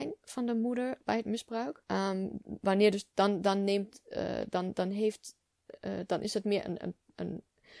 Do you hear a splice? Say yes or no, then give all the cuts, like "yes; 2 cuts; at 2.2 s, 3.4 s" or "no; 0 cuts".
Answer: yes; 1 cut; at 1.8 s